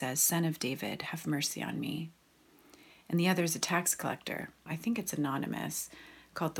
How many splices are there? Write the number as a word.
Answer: one